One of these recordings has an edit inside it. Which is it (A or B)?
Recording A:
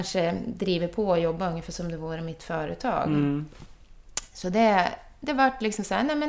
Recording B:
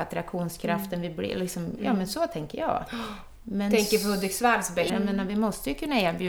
B